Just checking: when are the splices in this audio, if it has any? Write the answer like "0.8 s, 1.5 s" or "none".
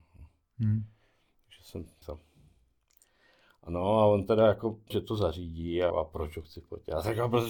2.0 s, 4.9 s, 5.9 s